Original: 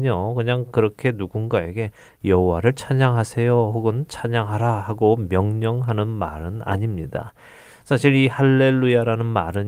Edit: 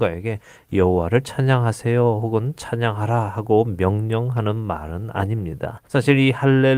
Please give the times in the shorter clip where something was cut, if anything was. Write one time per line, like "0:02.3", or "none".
0:05.8